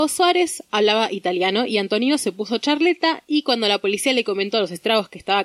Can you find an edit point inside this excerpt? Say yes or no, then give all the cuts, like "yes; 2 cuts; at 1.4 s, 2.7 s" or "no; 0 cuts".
no; 0 cuts